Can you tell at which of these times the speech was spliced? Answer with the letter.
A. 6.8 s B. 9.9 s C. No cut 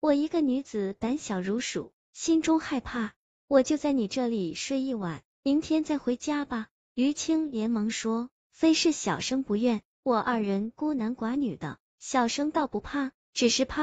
C